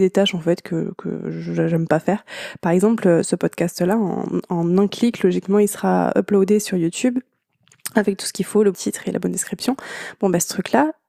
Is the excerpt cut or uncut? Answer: cut